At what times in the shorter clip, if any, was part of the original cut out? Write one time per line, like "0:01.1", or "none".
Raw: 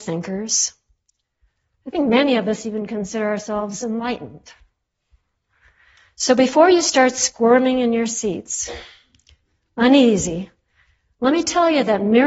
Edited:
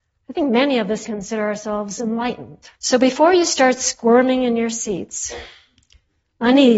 0:01.0
0:02.7

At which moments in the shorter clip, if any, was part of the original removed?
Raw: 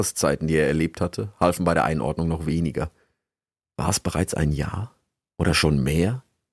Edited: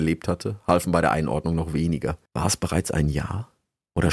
0:02.3

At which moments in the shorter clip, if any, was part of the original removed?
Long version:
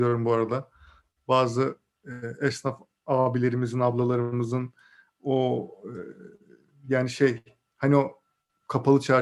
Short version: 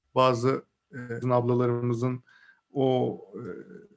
0:01.2

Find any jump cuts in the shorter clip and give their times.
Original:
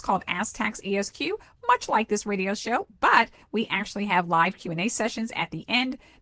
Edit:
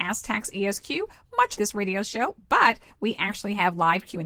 0:01.6

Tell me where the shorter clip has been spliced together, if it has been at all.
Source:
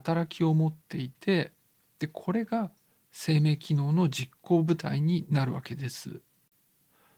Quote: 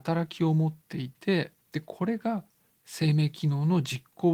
0:01.6

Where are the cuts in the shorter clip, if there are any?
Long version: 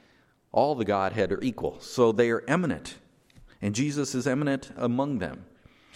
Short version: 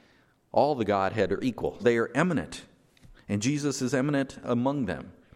0:01.8

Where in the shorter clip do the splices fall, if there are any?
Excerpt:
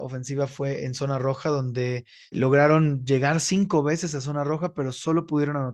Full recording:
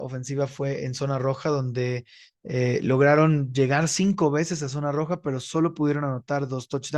0:02.3

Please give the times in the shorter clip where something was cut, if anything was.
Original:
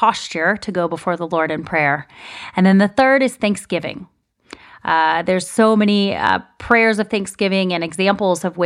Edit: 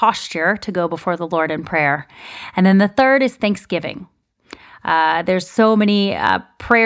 none

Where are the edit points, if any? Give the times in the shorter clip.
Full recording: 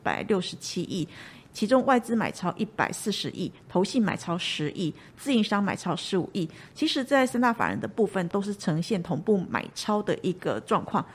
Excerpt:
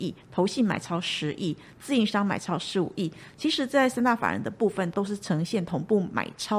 none

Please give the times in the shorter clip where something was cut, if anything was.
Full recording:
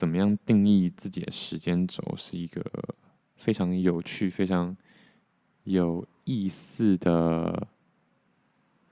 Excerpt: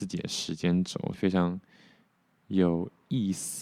0:01.1

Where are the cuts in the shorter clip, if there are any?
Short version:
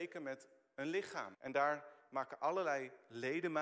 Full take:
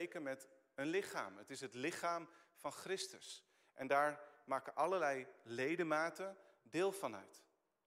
0:01.3

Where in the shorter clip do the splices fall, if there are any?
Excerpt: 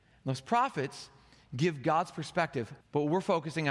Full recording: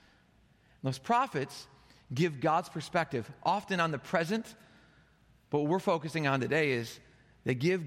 0:02.8

